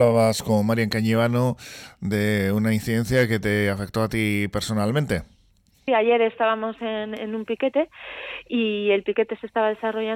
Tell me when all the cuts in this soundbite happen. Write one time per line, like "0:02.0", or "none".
0:05.9